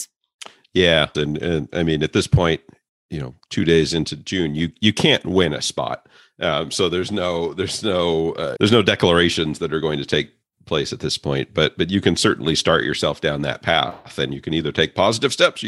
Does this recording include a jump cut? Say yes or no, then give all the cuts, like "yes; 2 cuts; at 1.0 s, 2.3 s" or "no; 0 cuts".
yes; 2 cuts; at 1.1 s, 8.6 s